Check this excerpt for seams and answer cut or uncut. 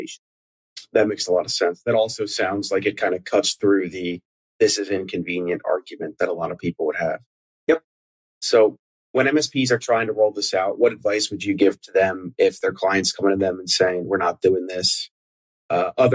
uncut